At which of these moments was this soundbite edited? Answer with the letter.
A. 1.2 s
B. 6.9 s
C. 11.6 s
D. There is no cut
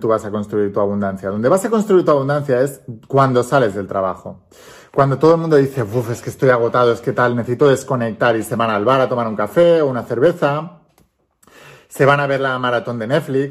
D